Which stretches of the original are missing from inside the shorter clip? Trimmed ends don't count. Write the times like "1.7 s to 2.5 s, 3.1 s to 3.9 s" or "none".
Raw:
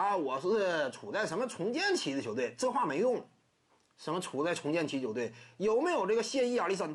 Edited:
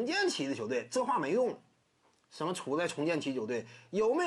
none